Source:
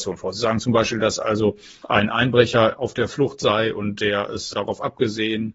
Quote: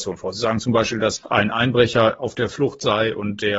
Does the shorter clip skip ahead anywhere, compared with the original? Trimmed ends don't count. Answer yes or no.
yes